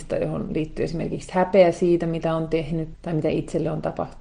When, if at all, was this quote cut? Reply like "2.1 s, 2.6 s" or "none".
2.9 s